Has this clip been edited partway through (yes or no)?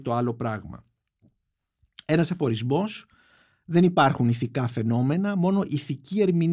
no